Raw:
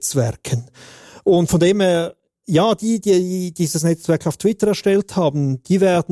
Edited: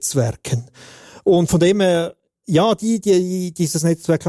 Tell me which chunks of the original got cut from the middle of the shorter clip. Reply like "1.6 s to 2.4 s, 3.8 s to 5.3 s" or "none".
none